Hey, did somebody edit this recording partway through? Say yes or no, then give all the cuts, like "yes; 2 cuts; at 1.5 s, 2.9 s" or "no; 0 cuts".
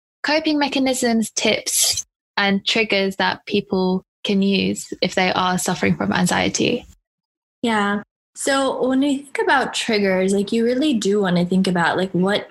no; 0 cuts